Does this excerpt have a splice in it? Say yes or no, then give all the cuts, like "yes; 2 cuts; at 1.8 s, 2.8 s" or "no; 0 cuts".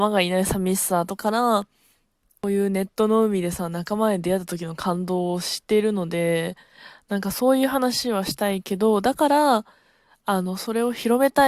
yes; 1 cut; at 1.2 s